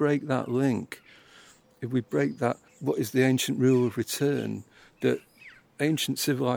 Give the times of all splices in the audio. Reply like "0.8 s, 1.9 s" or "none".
2.7 s